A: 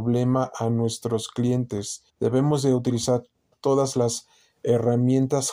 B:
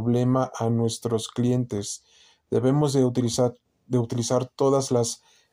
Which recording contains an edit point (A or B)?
A